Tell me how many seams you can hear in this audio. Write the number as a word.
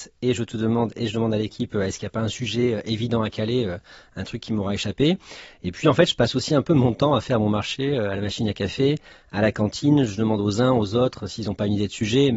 zero